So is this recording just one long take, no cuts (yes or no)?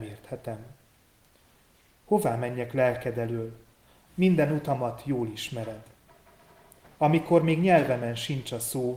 no